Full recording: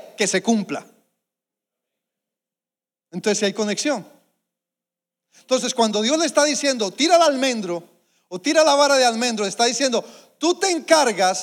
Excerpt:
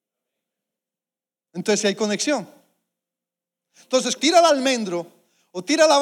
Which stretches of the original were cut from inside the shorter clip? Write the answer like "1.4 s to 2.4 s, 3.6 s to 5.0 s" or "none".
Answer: 5.7 s to 6.9 s